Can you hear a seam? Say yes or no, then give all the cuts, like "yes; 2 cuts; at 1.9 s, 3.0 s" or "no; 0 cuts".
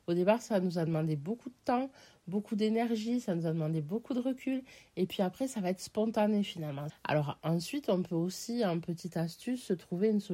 yes; 1 cut; at 6.9 s